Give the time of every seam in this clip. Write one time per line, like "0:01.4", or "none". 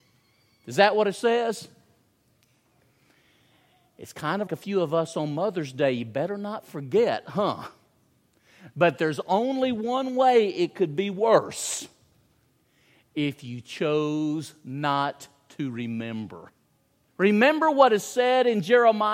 0:04.5
0:17.1